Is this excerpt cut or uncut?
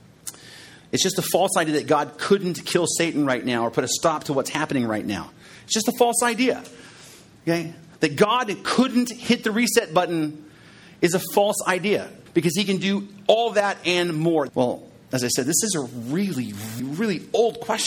cut